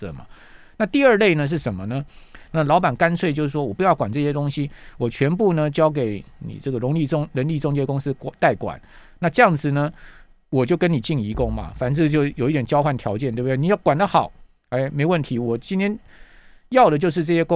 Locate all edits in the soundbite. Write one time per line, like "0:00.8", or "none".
0:02.5